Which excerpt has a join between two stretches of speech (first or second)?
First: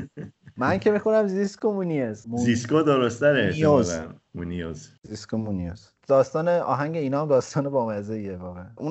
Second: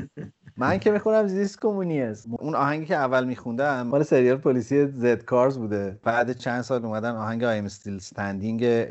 second